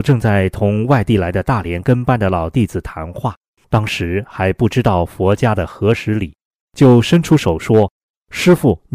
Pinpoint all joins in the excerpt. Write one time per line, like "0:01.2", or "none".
0:03.6

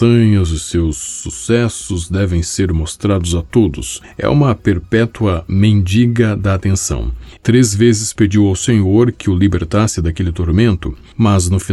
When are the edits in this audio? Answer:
0:07.4

